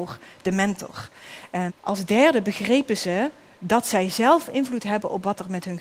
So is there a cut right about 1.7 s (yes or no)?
yes